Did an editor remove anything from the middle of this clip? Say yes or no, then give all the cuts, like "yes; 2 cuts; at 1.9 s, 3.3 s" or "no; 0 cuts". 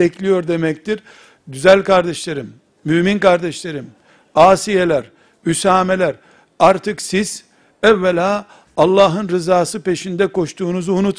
no; 0 cuts